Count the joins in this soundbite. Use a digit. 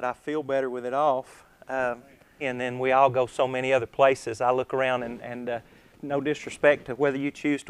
1